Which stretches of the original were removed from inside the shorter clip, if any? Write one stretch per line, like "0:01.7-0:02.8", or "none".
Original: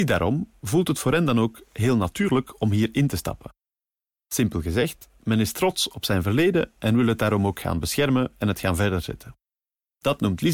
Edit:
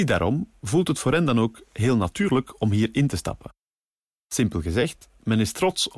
none

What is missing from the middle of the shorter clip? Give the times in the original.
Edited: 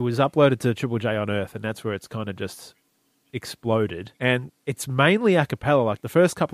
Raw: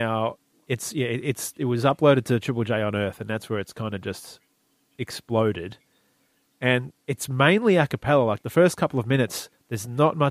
0:05.8-0:06.6

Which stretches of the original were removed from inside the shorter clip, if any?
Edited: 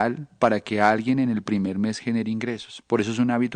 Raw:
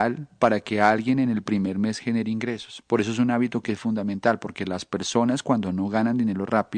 none

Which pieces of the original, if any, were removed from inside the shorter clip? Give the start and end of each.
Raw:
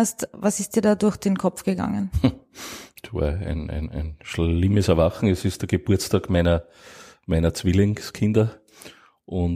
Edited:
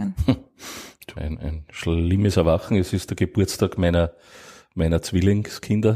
0:03.1-0:03.7

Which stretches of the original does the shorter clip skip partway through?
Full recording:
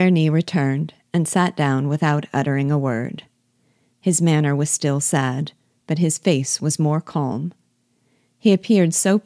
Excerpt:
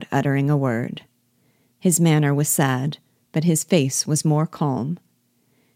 0:04.7-0:05.0

